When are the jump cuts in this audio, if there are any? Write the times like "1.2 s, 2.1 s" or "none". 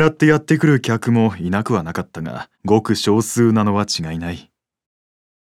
2.5 s